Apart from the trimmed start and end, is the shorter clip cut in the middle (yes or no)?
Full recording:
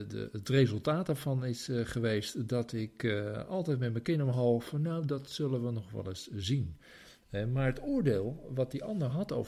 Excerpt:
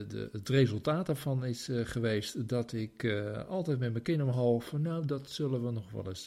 no